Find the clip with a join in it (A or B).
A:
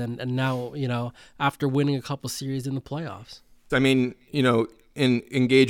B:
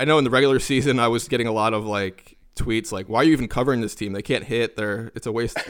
A